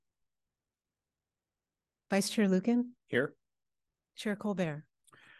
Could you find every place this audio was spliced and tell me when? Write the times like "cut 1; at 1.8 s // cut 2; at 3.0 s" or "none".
none